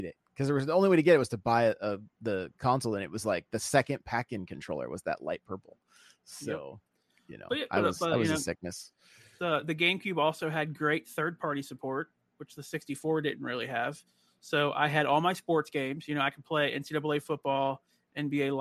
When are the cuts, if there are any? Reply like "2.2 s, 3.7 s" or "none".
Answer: none